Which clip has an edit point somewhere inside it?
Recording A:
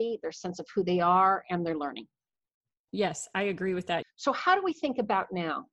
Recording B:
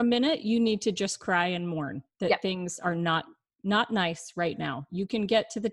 A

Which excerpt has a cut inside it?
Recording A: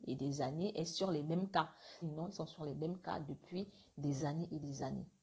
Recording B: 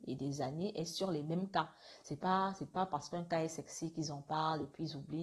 A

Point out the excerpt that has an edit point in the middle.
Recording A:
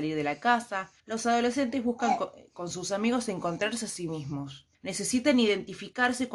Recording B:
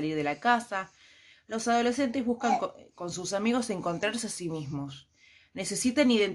A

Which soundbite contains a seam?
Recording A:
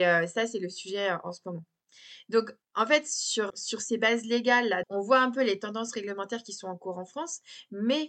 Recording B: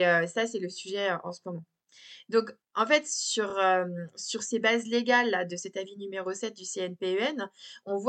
A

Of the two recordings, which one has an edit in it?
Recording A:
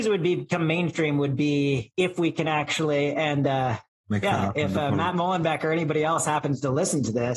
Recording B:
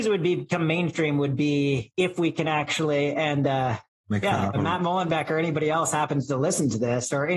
B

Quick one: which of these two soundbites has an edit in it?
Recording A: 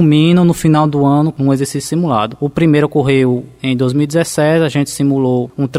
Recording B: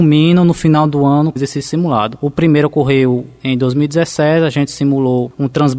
B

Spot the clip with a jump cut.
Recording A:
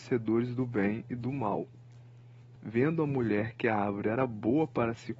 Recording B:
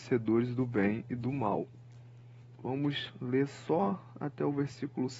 B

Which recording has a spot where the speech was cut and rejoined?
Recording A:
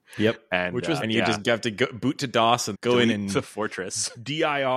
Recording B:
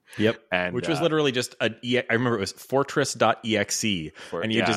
A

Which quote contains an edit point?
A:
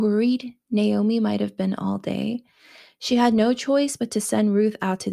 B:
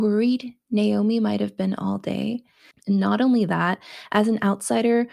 B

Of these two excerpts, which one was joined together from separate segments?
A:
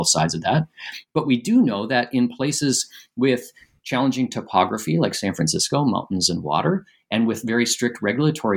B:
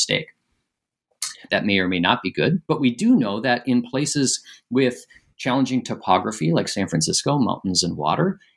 B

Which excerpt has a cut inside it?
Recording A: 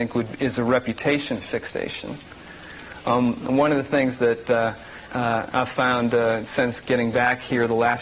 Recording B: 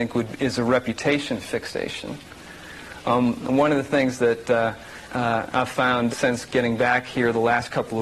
B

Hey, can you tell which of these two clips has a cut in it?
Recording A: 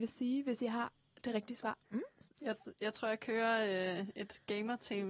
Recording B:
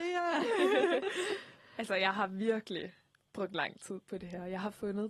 A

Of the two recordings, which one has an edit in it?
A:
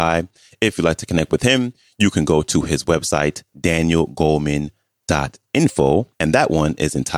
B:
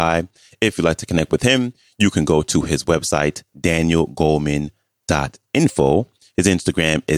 A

